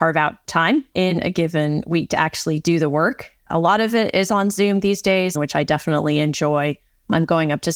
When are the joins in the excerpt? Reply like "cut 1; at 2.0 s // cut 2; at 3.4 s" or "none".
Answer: cut 1; at 5.3 s